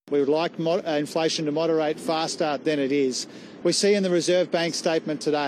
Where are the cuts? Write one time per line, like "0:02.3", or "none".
0:03.6